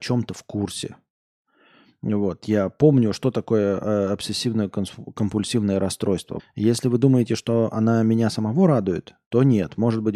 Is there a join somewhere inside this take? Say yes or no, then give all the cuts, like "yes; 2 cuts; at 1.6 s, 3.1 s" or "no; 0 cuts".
yes; 1 cut; at 6.4 s